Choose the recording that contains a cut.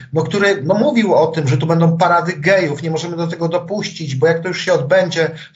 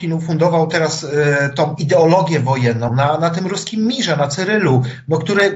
second; 1 cut; at 2.9 s

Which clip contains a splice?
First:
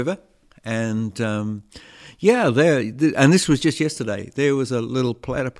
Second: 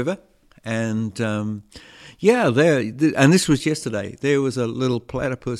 second; 1 cut; at 3.6 s

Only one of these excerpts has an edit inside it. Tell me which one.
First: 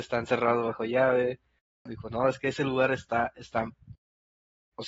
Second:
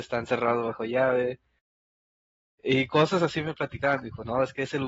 first; 1 cut; at 1.9 s

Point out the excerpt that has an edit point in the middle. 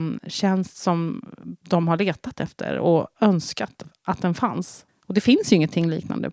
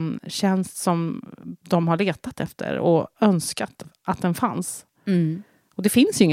first; 1 cut; at 4.9 s

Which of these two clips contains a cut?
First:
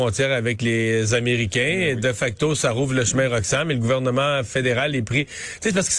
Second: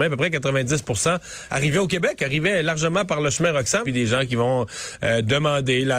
second; 1 cut; at 3.8 s

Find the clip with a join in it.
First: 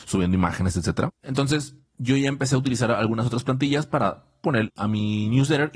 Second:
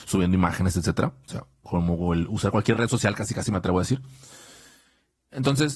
first; 2 cuts; at 1.1 s, 4.7 s

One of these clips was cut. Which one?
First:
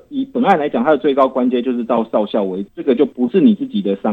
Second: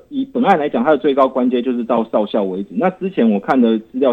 first; 1 cut; at 2.7 s

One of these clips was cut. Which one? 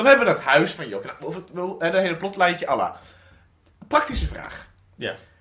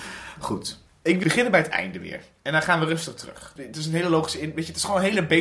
second; 2 cuts; at 1.2 s, 3.6 s

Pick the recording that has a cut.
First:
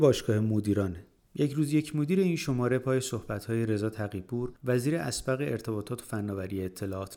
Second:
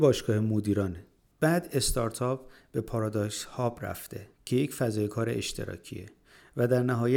second; 2 cuts; at 1.3 s, 4.3 s

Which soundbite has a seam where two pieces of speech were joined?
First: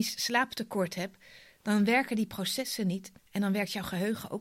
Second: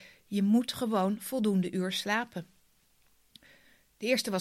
first; 1 cut; at 3.2 s

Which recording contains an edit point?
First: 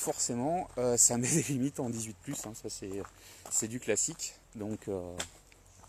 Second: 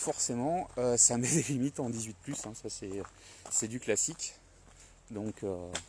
first; 1 cut; at 4.4 s

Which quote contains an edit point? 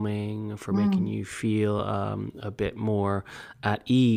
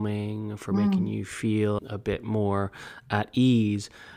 second; 1 cut; at 1.8 s

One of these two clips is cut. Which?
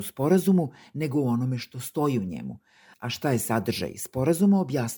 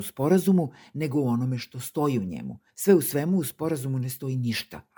second; 1 cut; at 2.7 s

